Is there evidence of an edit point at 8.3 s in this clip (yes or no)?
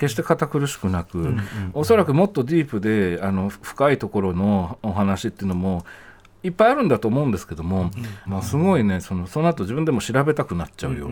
yes